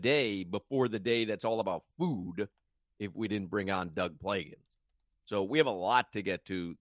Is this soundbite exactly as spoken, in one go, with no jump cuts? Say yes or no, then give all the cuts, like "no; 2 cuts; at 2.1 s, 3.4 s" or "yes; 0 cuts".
yes; 0 cuts